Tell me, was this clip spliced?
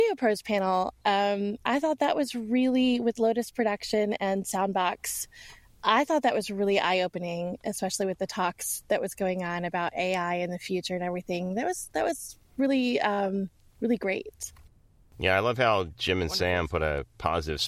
no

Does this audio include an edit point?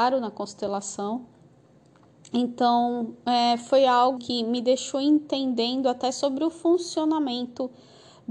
yes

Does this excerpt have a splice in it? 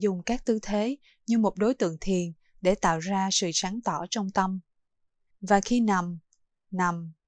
yes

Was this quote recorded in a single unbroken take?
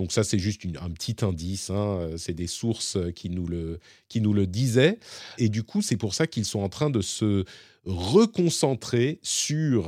no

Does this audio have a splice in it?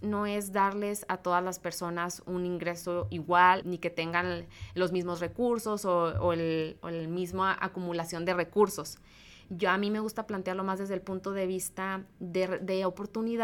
yes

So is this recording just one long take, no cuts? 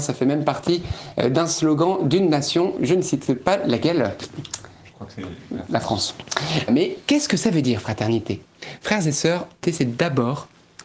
no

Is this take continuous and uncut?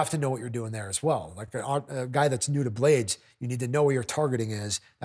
yes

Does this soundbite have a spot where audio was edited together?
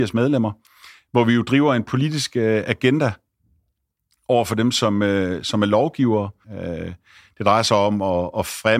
yes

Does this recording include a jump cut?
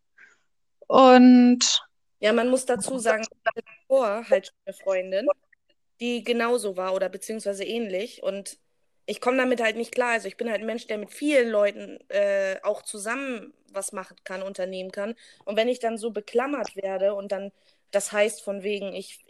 no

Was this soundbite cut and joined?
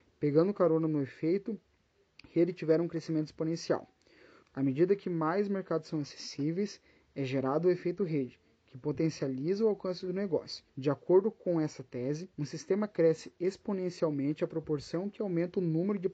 yes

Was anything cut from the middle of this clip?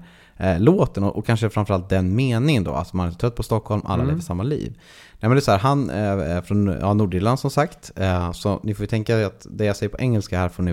no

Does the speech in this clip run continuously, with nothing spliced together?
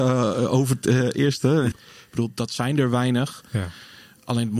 no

